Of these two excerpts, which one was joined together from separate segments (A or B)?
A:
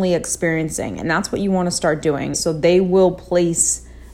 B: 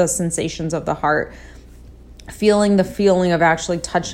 A